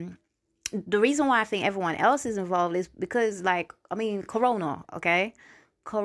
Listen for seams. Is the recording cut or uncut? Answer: uncut